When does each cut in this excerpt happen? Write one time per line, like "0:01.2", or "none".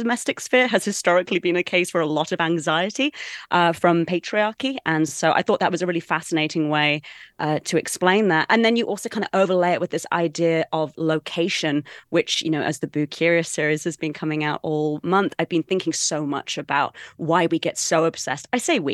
none